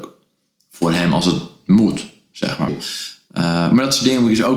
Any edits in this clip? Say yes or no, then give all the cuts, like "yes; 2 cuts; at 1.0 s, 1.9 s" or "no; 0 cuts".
yes; 1 cut; at 2.7 s